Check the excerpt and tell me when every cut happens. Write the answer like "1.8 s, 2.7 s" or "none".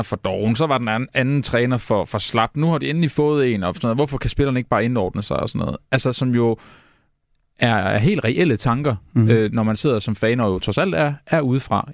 none